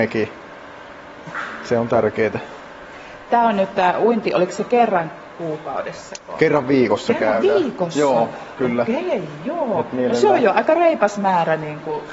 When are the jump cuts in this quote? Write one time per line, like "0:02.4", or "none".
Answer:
none